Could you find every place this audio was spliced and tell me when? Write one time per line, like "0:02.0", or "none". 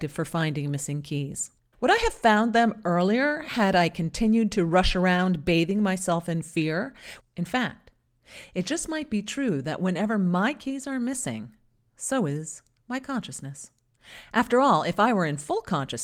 0:01.7
0:07.2